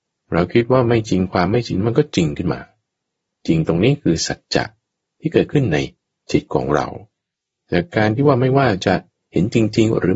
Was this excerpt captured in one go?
yes; 0 cuts

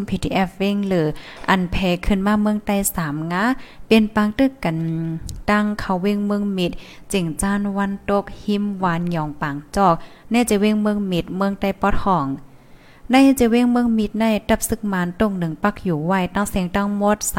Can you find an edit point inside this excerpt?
no; 0 cuts

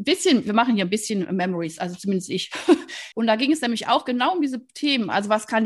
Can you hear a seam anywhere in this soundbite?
yes; 1 cut; at 3.1 s

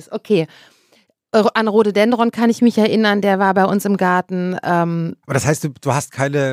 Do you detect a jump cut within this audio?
yes; 1 cut; at 5.2 s

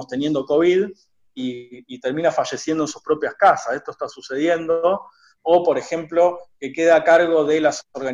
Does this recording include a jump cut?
no; 0 cuts

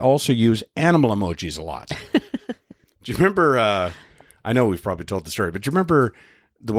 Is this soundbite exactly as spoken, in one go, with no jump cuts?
yes; 0 cuts

